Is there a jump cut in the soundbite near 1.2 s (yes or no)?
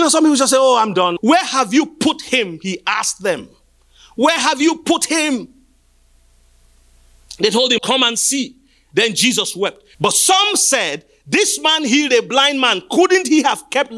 yes